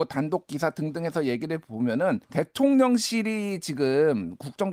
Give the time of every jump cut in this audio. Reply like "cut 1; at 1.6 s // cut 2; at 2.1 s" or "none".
cut 1; at 2.2 s